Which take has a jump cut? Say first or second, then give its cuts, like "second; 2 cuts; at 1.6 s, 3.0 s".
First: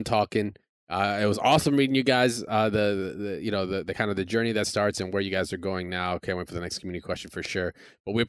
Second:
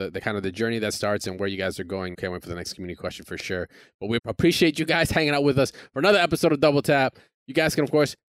second; 2 cuts; at 2.1 s, 4.2 s